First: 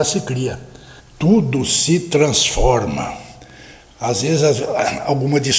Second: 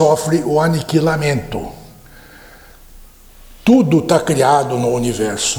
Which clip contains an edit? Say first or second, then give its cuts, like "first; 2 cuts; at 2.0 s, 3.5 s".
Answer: first; 1 cut; at 1.0 s